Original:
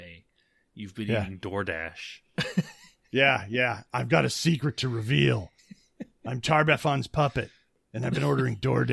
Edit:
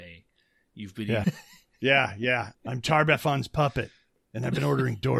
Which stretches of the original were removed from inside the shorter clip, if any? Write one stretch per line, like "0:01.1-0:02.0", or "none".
0:01.2-0:02.5
0:03.9-0:06.1

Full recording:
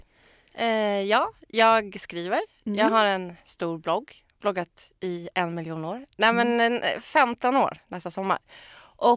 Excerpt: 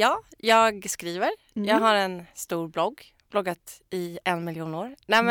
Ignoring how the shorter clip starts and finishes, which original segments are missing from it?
none

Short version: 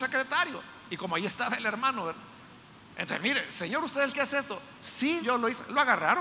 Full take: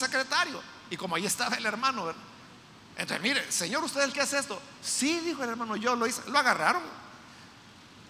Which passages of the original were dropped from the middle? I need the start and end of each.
0:05.2-0:05.8

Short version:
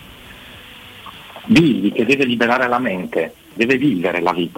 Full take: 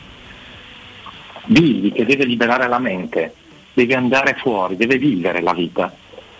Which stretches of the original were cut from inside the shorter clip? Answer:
0:03.6-0:04.8

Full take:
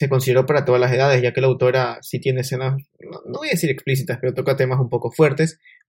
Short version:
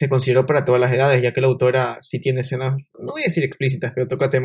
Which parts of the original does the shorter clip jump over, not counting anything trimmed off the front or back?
0:02.9-0:03.2

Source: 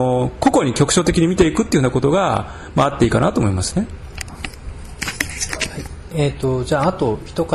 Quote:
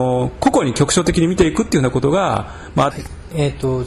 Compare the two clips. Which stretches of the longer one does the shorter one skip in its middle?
0:02.9-0:05.7

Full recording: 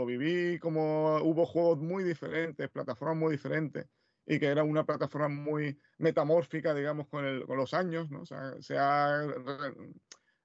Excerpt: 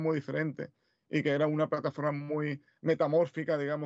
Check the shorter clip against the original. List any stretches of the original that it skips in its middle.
none

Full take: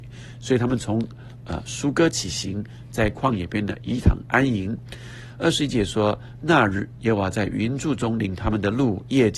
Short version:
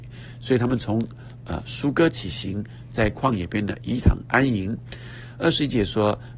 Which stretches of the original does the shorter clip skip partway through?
none

